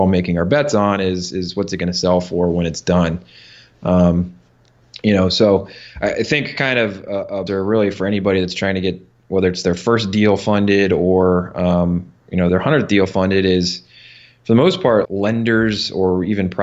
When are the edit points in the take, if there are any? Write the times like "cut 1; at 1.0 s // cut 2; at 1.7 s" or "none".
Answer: cut 1; at 7.5 s // cut 2; at 12.5 s // cut 3; at 15.0 s